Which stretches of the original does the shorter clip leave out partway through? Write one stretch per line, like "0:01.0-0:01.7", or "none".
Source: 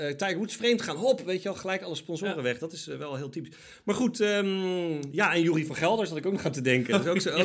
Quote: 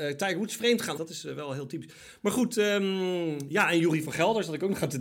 0:01.0-0:02.6